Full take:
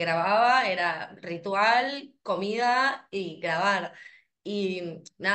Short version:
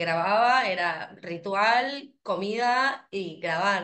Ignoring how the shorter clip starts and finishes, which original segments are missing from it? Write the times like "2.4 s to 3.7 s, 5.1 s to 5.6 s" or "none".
none

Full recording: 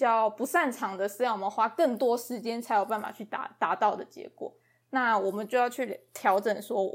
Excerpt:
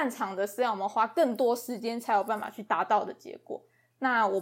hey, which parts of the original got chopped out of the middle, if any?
3.3 s to 3.6 s

